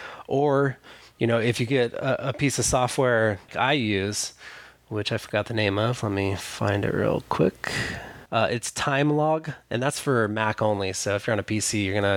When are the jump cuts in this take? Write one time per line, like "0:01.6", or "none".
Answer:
0:03.5
0:08.3